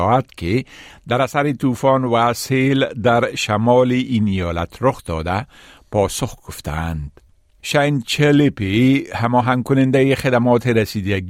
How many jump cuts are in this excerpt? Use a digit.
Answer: 1